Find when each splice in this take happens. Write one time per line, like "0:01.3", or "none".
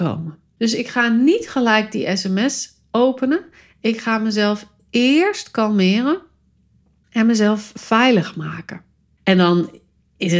0:09.2